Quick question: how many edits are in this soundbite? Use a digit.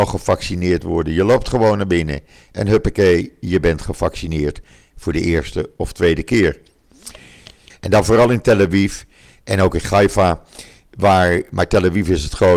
1